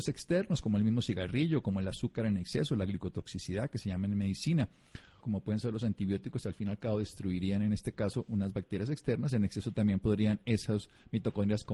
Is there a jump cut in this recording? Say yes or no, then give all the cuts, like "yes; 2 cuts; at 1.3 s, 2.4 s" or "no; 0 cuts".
yes; 1 cut; at 5.2 s